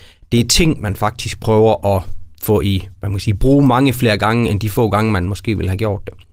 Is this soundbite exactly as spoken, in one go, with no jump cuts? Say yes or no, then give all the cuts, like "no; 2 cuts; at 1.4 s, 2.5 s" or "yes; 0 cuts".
yes; 0 cuts